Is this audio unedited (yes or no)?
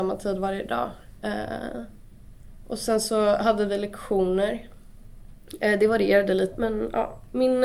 no